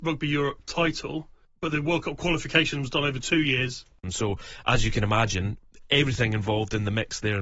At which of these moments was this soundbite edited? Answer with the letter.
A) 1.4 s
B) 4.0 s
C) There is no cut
B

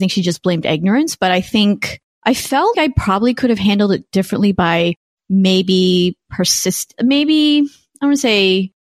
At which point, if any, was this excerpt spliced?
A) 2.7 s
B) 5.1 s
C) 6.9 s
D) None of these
A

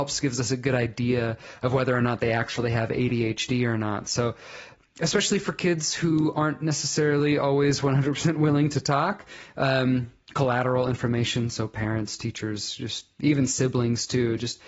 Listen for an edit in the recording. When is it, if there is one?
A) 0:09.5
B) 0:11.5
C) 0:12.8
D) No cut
D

